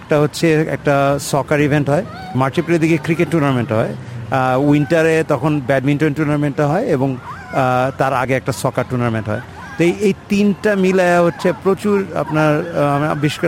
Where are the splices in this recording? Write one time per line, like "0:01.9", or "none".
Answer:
0:08.2